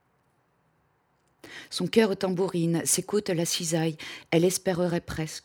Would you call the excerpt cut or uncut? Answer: uncut